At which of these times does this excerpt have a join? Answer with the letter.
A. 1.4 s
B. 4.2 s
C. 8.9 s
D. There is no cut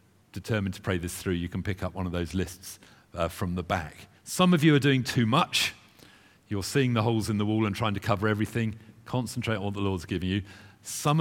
B